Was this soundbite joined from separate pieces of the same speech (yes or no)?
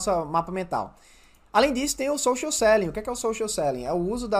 no